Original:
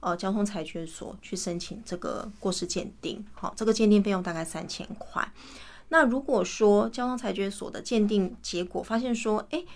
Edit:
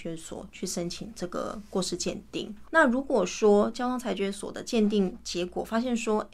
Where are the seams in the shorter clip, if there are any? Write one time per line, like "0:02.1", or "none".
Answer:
0:02.6